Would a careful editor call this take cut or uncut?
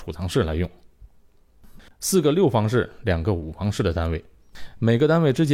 cut